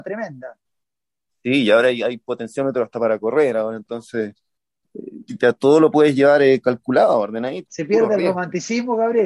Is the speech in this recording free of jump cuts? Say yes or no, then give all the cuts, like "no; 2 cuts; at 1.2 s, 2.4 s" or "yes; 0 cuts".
no; 1 cut; at 7.7 s